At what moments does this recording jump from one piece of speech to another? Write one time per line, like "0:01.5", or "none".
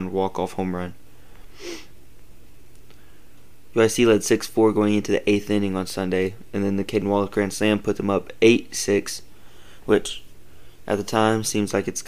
0:03.7